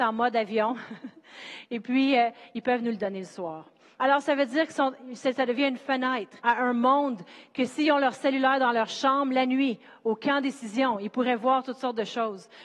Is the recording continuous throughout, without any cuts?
no; 2 cuts; at 4.0 s, 6.4 s

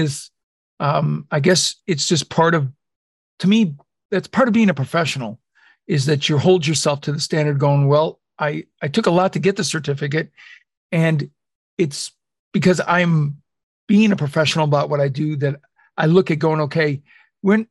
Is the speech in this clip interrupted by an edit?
no; 0 cuts

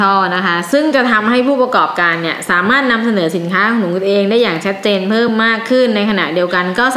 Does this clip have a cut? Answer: no; 0 cuts

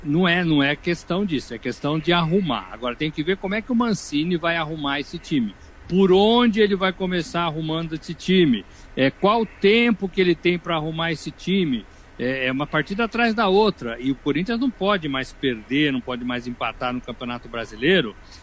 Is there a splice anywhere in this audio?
no; 0 cuts

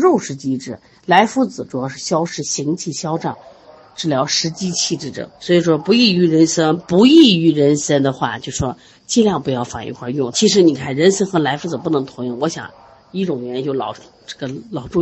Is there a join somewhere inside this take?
yes; 2 cuts; at 5.3 s, 10.3 s

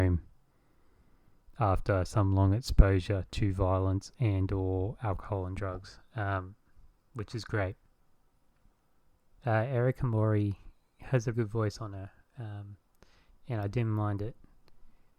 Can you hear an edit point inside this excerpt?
yes; 2 cuts; at 9.4 s, 11.3 s

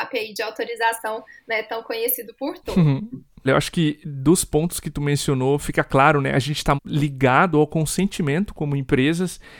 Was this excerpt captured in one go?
no; 2 cuts; at 3.5 s, 6.8 s

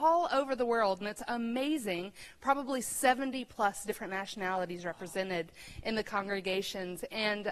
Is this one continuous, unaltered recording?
yes; 0 cuts

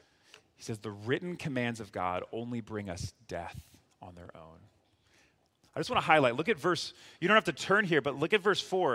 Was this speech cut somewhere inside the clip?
no; 0 cuts

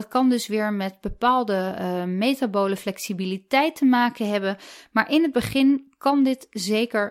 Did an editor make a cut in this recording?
no; 0 cuts

